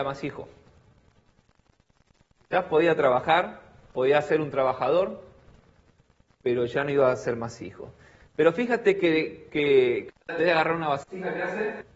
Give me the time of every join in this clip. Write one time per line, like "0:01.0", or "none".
0:10.1